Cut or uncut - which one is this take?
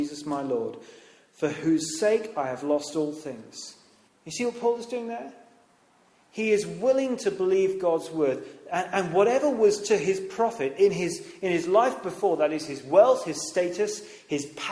cut